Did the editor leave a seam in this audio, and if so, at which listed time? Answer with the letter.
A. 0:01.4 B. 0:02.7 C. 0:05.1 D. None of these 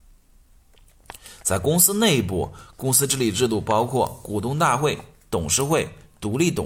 D